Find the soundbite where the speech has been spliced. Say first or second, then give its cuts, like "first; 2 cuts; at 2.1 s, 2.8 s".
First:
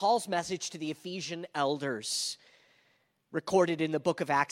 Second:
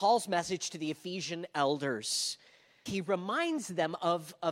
second; 1 cut; at 2.9 s